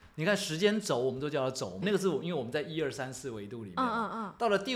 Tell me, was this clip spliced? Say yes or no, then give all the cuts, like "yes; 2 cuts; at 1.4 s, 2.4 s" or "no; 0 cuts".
yes; 1 cut; at 1.8 s